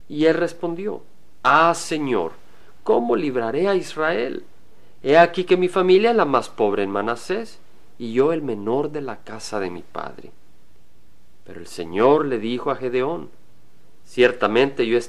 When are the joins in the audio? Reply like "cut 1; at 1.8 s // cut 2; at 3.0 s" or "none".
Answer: none